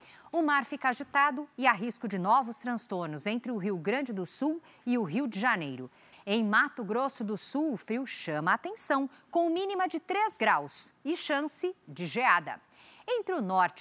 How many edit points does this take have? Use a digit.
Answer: 1